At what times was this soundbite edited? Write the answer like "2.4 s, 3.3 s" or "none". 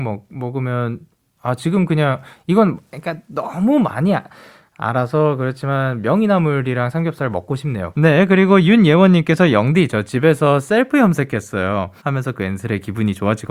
7.9 s, 12.0 s